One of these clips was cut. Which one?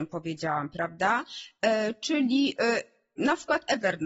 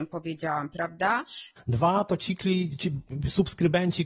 second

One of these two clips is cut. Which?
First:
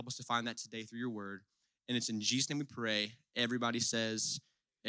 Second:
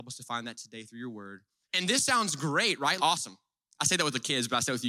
second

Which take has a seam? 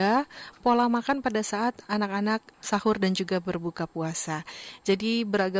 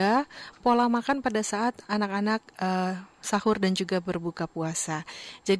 first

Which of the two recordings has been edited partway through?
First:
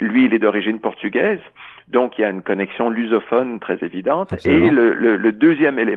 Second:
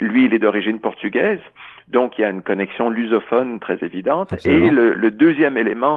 second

